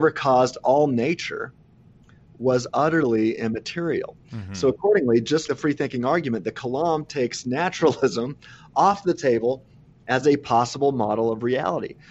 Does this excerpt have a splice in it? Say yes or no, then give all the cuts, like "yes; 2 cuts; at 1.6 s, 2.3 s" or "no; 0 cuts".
yes; 1 cut; at 5.5 s